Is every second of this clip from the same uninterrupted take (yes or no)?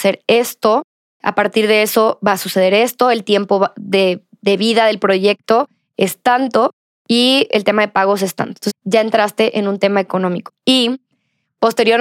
no